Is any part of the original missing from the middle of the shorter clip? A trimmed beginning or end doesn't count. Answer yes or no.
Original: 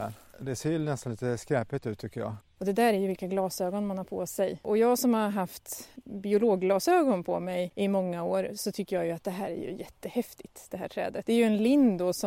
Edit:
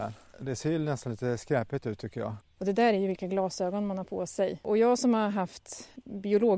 no